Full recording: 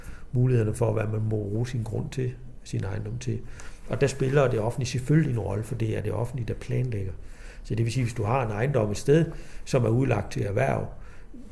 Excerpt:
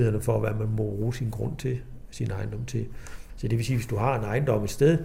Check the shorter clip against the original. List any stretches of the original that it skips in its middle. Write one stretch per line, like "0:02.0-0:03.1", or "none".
0:03.8-0:07.6